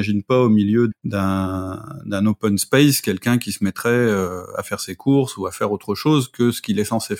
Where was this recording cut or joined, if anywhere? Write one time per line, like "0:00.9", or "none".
0:00.9